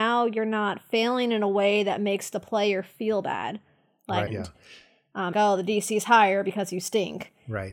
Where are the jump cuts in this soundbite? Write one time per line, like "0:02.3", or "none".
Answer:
0:04.3
0:05.3